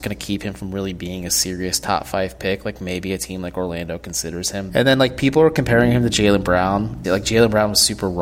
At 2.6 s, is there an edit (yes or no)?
no